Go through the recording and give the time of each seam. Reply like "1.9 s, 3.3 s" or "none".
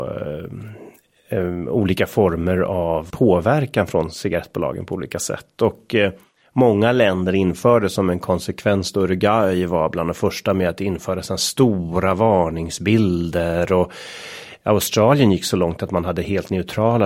3.1 s